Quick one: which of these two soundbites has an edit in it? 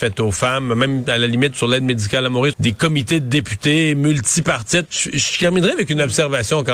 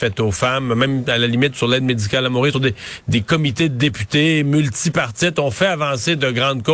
first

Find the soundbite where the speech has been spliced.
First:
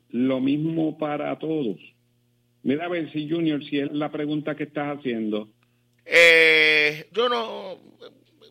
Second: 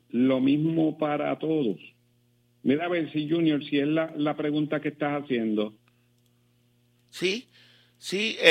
first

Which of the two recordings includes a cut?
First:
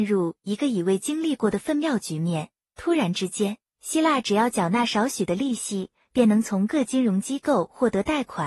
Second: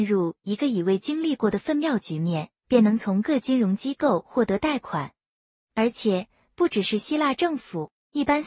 second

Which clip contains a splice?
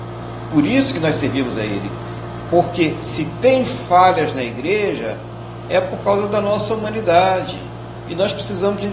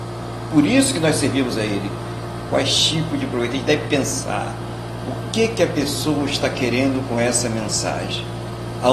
second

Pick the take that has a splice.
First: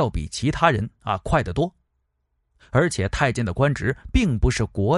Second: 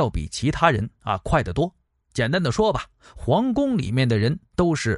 second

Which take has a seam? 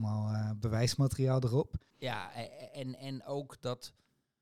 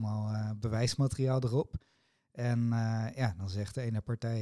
first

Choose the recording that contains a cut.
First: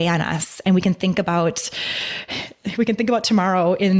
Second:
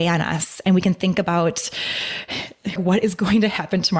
second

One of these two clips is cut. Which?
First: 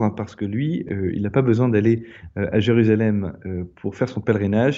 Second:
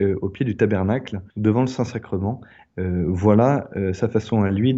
second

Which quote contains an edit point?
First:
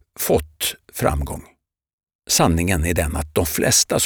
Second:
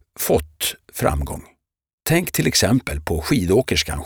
second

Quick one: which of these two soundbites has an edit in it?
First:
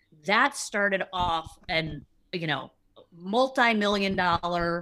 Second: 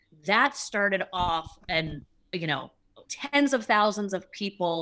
second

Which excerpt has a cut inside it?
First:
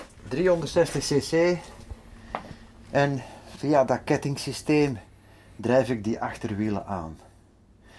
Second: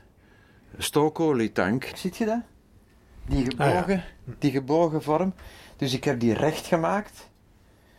second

